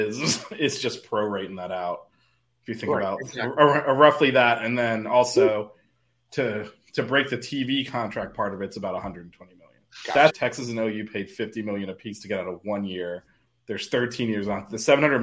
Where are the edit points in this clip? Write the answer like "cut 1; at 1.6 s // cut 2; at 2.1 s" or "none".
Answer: cut 1; at 10.3 s